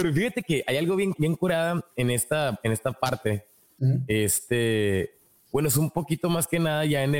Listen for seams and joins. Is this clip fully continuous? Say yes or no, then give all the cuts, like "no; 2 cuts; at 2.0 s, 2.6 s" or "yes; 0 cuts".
no; 1 cut; at 1.2 s